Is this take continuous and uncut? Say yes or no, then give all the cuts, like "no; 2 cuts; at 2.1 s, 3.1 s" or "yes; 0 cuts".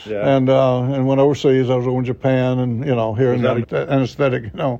no; 1 cut; at 3.6 s